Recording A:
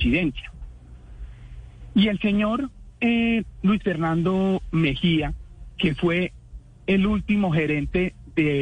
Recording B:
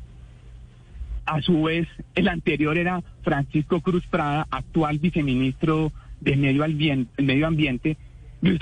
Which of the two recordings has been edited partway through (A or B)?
B